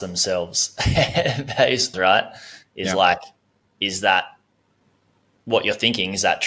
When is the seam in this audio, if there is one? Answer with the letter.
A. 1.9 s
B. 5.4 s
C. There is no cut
A